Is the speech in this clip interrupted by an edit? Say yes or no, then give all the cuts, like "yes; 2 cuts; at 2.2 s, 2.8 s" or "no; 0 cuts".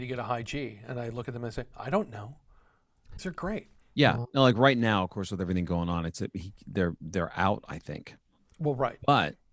yes; 1 cut; at 3.2 s